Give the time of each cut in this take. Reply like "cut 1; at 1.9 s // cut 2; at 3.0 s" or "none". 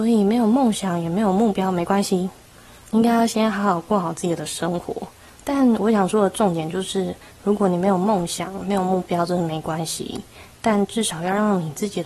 cut 1; at 5.3 s